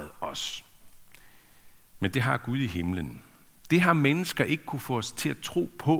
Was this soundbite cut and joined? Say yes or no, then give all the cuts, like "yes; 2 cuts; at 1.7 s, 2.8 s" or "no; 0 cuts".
no; 0 cuts